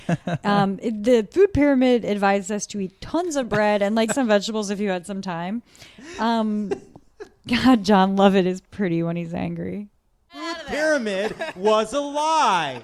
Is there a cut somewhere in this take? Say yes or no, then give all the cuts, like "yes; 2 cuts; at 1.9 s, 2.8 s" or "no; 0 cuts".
yes; 1 cut; at 4.1 s